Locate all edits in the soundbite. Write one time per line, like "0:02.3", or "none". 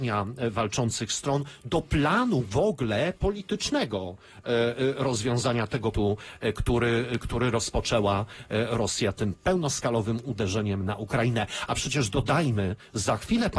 0:05.9